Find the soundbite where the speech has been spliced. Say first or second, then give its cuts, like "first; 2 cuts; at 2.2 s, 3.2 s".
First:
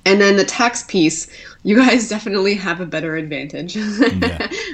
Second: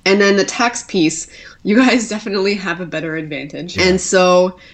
second; 1 cut; at 3.7 s